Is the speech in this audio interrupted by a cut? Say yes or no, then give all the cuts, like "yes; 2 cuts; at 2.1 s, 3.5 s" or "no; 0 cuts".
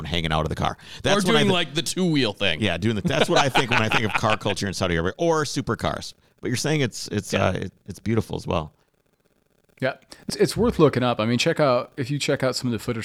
yes; 1 cut; at 10.3 s